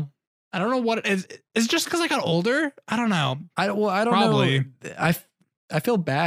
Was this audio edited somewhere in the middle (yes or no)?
no